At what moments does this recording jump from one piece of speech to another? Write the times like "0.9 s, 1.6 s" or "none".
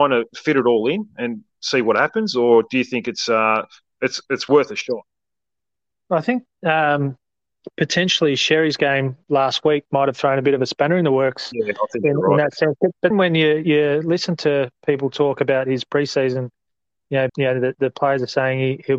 13.1 s, 17.3 s